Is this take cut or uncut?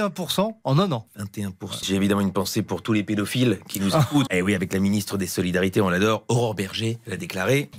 cut